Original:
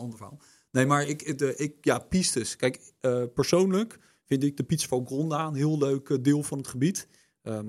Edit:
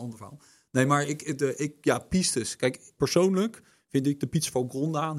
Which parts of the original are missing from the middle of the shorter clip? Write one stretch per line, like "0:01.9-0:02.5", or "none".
0:03.0-0:03.3